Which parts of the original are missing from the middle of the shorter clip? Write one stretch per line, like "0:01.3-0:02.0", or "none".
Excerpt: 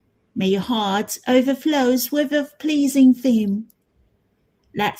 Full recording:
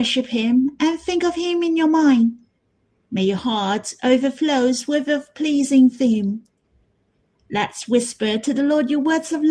none